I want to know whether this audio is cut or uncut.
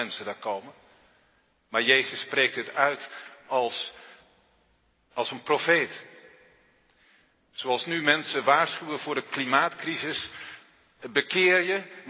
cut